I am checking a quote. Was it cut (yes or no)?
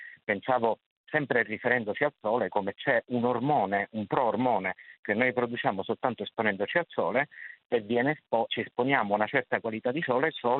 yes